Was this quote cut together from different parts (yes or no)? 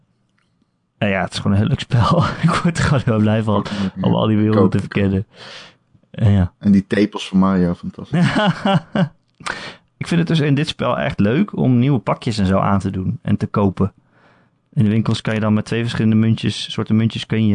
no